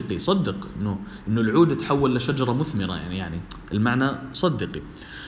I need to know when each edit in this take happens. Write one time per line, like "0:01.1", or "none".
none